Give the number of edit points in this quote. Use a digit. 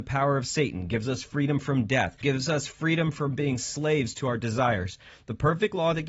1